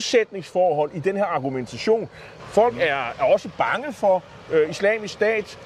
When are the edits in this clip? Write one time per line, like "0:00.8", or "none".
0:02.4